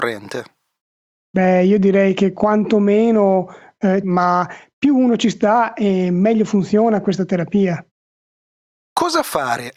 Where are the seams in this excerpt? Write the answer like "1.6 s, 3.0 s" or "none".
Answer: 4.0 s